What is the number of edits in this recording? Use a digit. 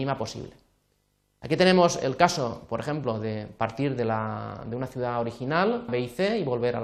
1